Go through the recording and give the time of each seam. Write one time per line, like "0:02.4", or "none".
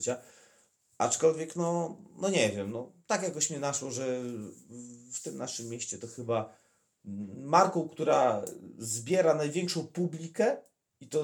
none